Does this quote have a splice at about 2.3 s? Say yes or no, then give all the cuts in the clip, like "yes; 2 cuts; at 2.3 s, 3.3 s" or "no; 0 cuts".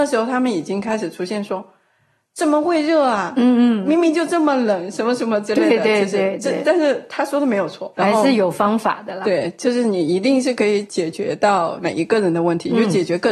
no; 1 cut; at 7.9 s